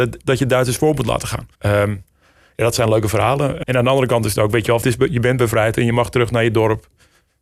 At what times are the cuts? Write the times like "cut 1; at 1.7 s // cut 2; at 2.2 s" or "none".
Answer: cut 1; at 1.5 s // cut 2; at 3.6 s // cut 3; at 4.8 s